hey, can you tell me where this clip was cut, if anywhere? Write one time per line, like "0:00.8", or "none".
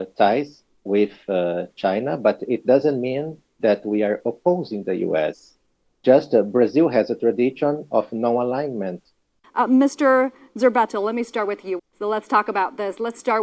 0:09.4
0:11.8